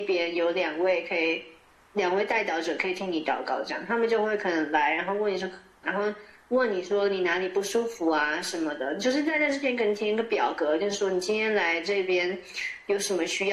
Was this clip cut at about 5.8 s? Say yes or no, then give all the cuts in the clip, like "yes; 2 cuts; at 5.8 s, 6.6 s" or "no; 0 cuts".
yes; 1 cut; at 5.8 s